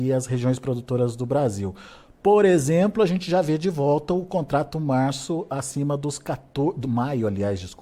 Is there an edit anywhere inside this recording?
no; 0 cuts

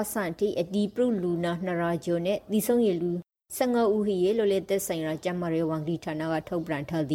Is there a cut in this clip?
no; 0 cuts

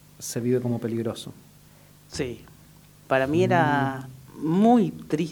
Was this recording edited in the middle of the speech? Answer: yes; 1 cut; at 2.9 s

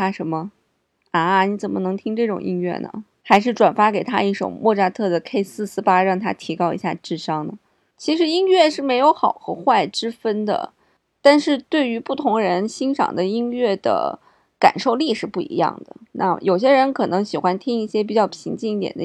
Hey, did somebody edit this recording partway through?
no; 0 cuts

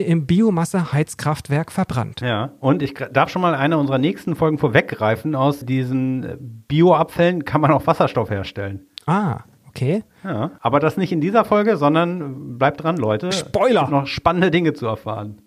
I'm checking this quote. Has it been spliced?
yes; 1 cut; at 5.6 s

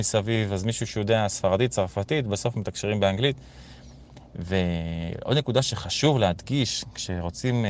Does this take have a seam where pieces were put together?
no; 0 cuts

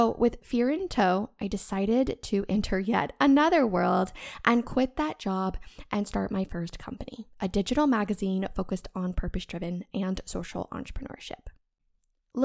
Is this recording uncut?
yes; 0 cuts

